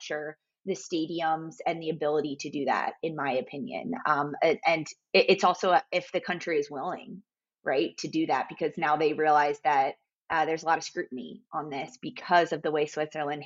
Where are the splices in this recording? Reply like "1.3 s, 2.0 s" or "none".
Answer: none